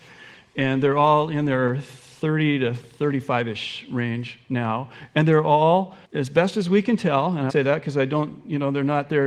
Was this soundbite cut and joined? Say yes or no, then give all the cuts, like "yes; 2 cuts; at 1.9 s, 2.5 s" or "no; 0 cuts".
yes; 2 cuts; at 6.0 s, 7.5 s